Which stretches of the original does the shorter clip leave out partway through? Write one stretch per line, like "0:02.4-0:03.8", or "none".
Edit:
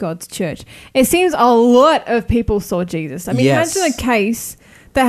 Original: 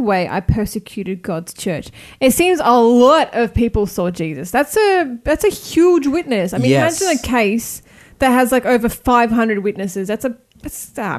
0:04.5-0:06.5

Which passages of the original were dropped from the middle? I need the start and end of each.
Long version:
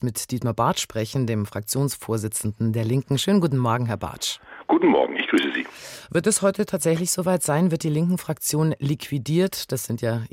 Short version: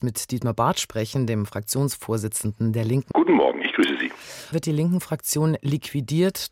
0:03.1-0:04.7
0:06.1-0:07.7

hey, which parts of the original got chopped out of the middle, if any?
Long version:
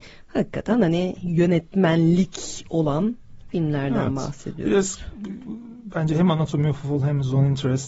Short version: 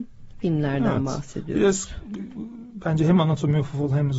none

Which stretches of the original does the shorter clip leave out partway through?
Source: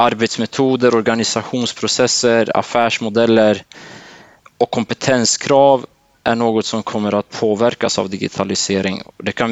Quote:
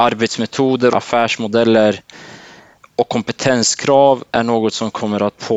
0:00.9-0:02.5
0:05.9-0:06.2

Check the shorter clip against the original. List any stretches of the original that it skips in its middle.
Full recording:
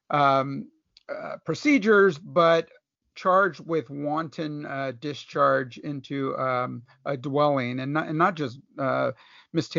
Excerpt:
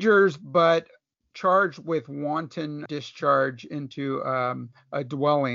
0:04.7-0:05.0

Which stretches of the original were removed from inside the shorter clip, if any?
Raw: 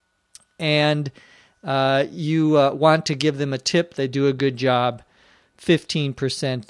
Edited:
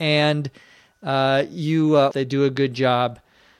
0:02.7-0:03.9

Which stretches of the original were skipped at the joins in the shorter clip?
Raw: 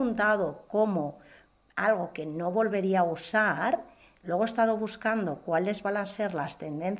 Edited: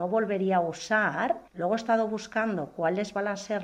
0:03.9-0:04.2

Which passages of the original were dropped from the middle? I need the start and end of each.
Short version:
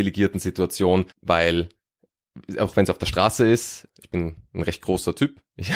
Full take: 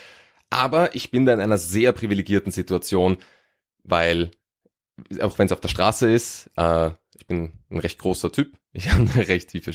0:03.2-0:03.7
0:06.5-0:07.0

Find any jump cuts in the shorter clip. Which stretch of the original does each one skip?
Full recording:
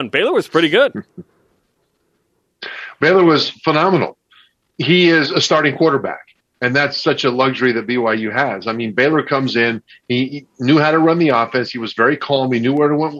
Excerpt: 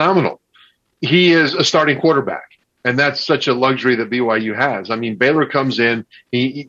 none

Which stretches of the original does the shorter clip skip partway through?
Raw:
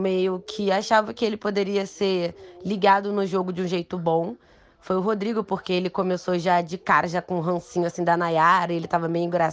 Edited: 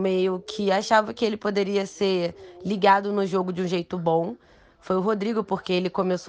none

